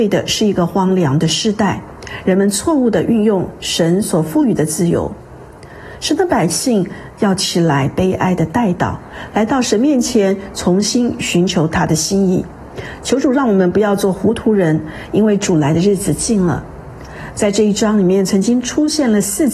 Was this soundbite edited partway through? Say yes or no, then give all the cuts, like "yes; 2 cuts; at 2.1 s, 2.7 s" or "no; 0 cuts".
no; 0 cuts